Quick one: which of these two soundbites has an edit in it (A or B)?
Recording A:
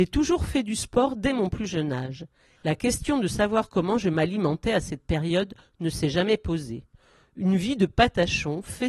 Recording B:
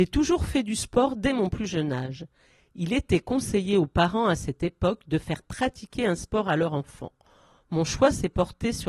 A